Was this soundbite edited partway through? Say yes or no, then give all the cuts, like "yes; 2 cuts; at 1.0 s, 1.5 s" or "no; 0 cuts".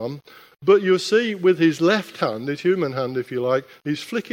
no; 0 cuts